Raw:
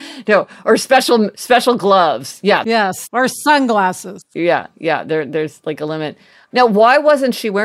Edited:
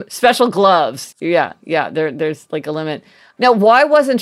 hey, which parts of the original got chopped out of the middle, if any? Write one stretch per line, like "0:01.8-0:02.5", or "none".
0:02.4-0:04.3